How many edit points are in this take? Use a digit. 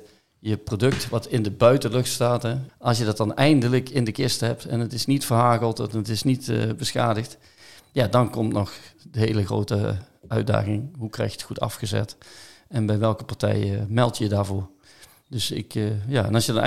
1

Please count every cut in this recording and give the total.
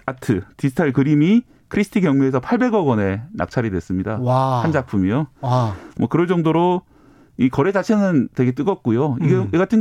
0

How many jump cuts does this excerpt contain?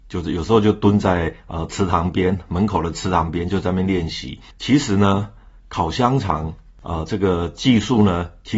1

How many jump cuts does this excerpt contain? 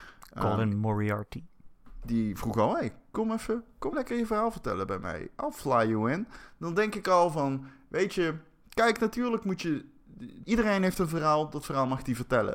2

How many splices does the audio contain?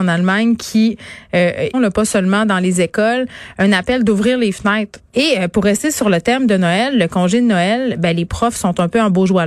2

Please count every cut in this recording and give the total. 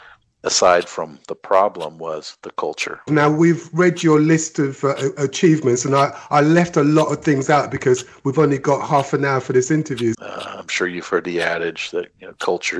2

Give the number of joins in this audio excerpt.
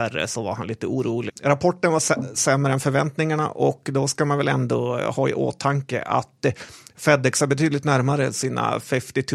1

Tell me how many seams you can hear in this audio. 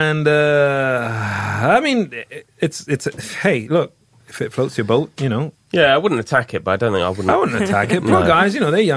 0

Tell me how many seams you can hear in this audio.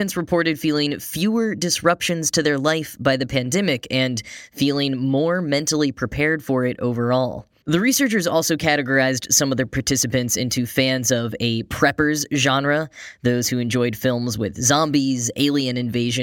1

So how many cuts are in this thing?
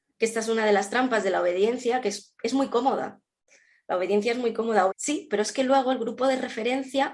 1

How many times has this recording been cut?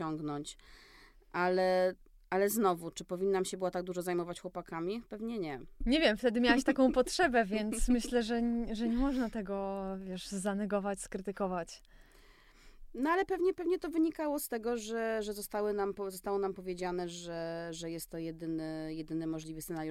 1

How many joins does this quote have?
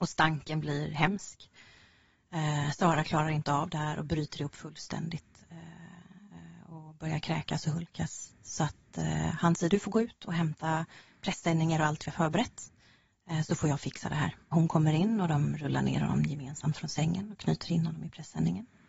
1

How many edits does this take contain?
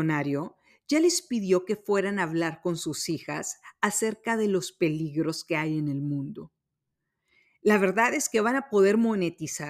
0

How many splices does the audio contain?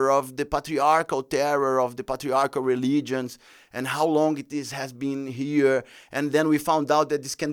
0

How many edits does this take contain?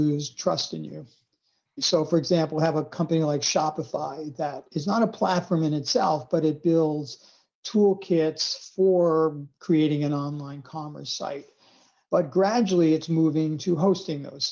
0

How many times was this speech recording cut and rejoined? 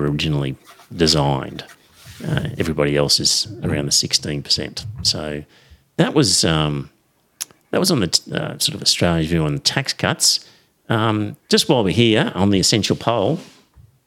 0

